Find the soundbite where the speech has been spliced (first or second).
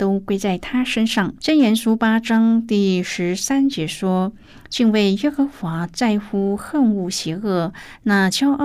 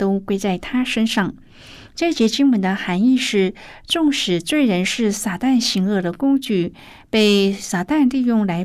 first